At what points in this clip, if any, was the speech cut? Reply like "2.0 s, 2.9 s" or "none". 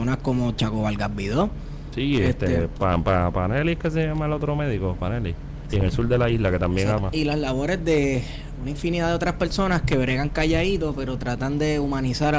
5.7 s, 7.0 s